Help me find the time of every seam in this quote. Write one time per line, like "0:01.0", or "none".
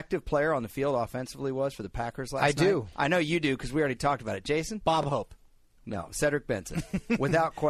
none